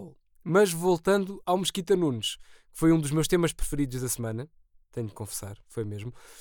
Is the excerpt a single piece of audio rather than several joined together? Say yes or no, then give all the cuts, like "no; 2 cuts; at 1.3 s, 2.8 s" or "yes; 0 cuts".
yes; 0 cuts